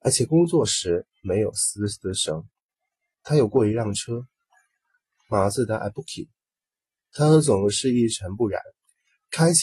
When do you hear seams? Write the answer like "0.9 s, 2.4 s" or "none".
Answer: none